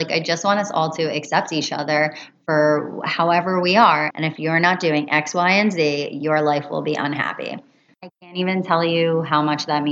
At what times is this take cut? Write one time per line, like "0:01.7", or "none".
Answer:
0:04.1
0:07.9